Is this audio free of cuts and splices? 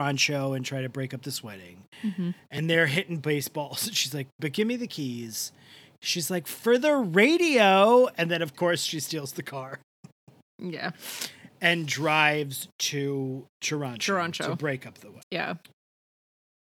no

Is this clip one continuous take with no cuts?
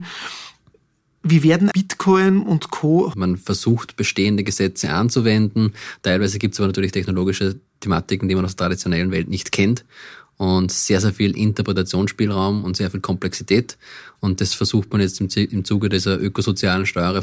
no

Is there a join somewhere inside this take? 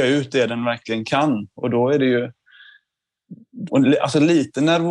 yes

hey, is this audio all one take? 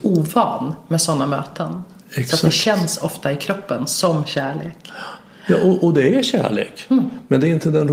yes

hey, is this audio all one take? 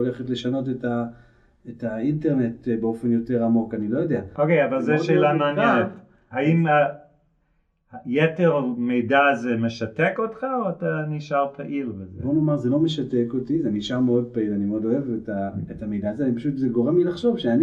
yes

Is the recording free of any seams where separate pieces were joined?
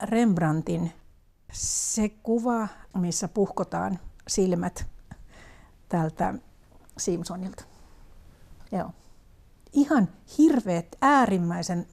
no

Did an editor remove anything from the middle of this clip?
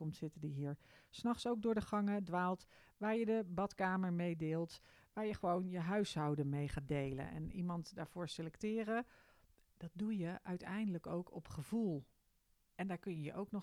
no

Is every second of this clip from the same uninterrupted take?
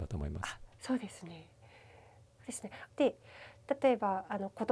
no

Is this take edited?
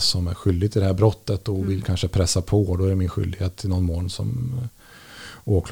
no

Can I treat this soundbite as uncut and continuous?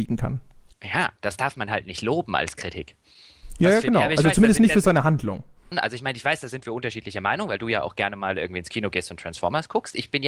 no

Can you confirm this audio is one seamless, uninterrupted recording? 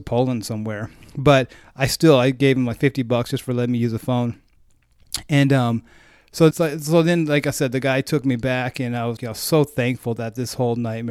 no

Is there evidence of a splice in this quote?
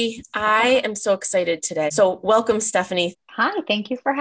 yes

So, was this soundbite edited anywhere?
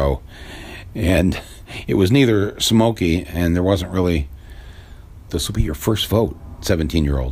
yes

